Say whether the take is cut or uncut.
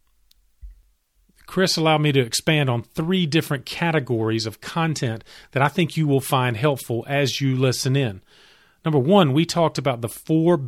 uncut